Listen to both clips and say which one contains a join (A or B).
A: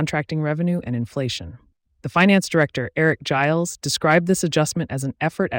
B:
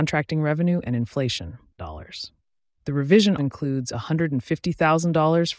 B